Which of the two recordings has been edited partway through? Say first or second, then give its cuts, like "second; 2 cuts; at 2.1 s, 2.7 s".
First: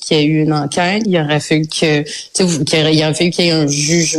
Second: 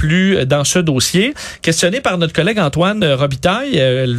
first; 1 cut; at 1.0 s